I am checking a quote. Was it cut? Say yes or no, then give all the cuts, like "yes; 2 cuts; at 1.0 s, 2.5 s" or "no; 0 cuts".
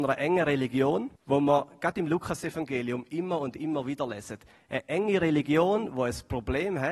yes; 1 cut; at 1.2 s